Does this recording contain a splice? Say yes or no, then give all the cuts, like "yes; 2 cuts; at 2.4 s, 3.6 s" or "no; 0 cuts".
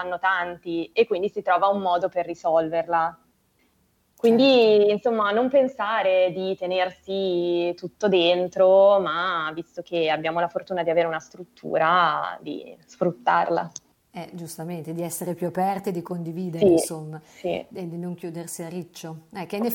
no; 0 cuts